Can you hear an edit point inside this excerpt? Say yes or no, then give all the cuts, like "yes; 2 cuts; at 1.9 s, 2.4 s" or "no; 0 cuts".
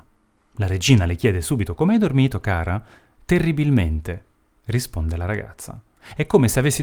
no; 0 cuts